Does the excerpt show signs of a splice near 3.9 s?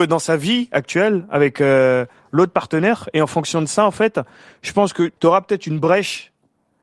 no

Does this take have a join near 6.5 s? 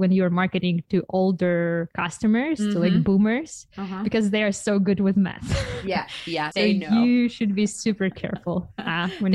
yes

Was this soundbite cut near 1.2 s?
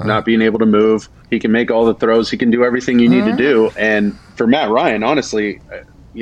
yes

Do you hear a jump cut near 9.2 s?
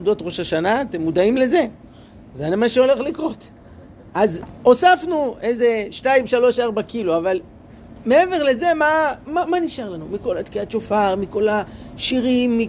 yes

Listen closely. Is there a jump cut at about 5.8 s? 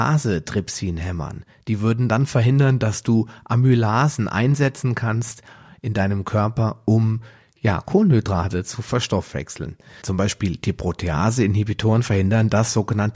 no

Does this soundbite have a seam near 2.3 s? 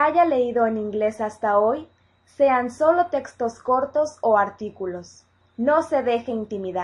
no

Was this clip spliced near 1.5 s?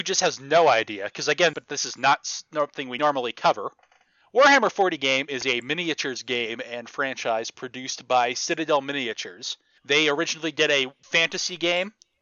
yes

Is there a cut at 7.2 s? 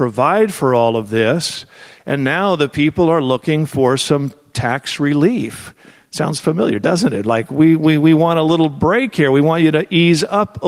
no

